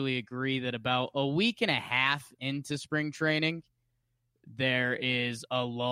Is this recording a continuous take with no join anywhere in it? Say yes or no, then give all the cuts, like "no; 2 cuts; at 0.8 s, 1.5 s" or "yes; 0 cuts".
yes; 0 cuts